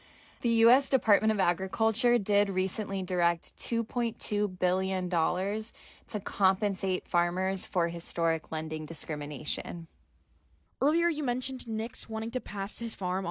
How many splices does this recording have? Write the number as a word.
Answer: zero